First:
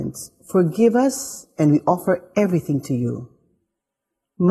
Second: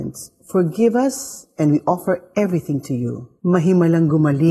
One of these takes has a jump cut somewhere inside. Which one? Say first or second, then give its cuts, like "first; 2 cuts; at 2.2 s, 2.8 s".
second; 1 cut; at 3.4 s